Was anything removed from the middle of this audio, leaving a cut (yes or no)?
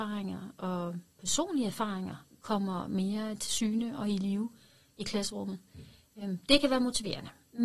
no